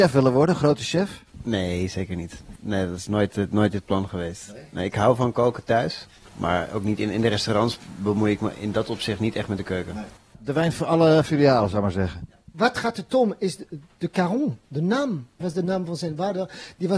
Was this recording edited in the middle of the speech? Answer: yes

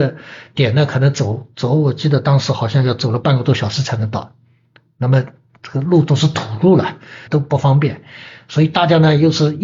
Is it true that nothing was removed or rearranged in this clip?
no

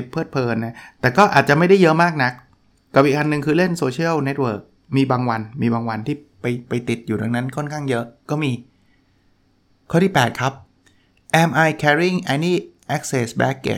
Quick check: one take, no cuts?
yes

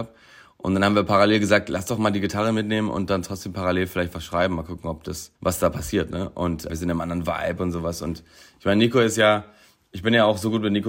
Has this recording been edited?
yes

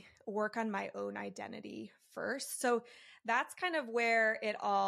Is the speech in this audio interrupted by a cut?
no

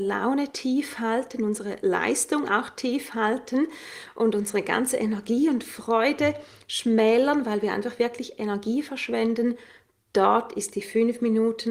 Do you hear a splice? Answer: no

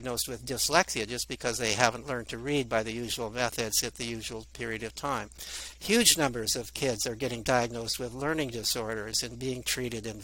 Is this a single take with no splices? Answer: yes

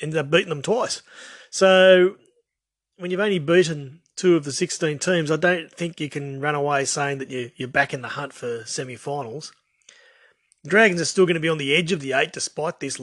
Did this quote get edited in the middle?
no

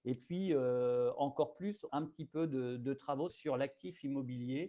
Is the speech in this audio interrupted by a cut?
yes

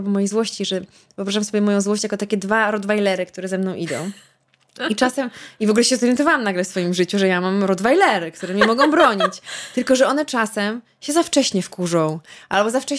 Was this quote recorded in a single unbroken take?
yes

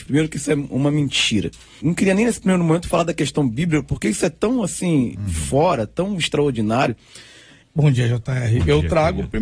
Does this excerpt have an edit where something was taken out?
yes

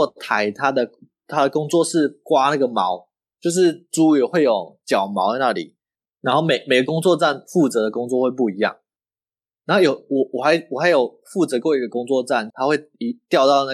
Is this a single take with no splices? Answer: no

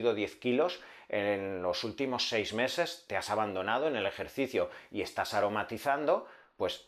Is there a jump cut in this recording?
no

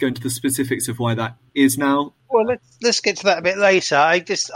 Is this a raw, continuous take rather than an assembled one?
yes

